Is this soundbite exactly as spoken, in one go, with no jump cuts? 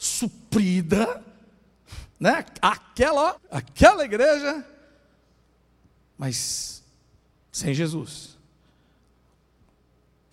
no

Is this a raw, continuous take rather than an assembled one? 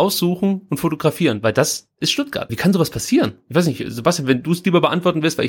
no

